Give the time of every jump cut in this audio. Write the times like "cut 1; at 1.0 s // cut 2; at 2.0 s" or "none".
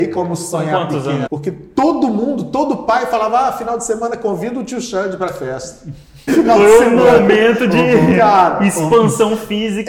cut 1; at 1.3 s // cut 2; at 6.3 s